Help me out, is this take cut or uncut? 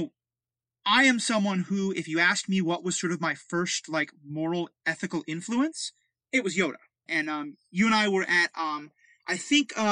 cut